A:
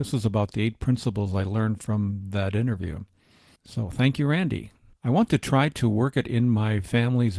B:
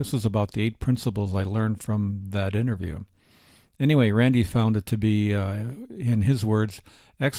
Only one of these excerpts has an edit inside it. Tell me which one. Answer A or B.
A